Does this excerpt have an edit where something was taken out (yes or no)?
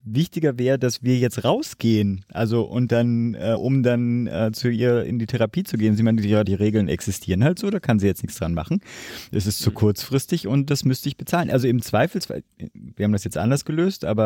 yes